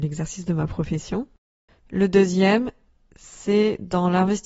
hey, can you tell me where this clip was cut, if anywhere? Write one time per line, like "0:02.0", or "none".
0:01.7